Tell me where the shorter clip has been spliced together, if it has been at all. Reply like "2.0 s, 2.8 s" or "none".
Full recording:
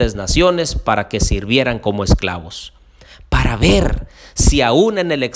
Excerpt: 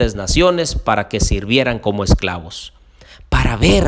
none